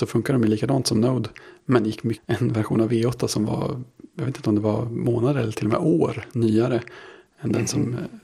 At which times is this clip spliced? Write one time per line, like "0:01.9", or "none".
0:02.2